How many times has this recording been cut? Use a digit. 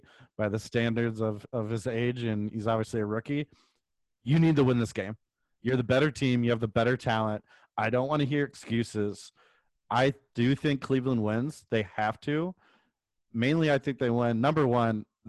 0